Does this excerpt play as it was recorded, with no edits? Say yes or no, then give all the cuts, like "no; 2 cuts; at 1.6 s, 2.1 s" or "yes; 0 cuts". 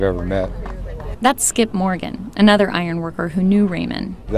no; 1 cut; at 1.1 s